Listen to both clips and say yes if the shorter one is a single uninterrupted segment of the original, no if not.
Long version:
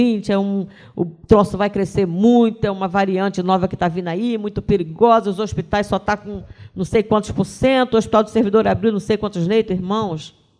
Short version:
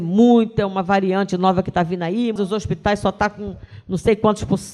no